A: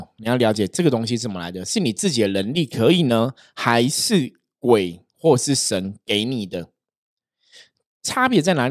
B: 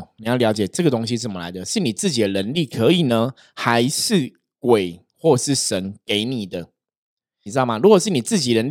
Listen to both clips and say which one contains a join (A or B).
B